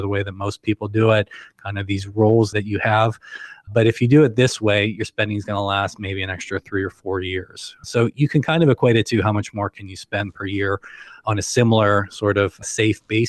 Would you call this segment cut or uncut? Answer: uncut